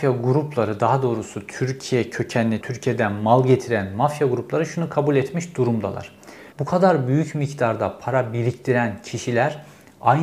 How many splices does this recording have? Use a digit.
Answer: 2